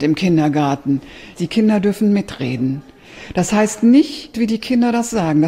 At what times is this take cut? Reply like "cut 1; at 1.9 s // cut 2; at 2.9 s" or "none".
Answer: cut 1; at 1.3 s // cut 2; at 4.3 s